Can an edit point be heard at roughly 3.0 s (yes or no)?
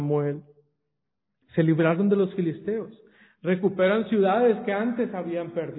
no